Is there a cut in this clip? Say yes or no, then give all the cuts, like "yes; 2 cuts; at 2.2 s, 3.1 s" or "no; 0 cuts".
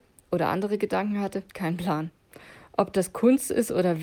yes; 1 cut; at 1.5 s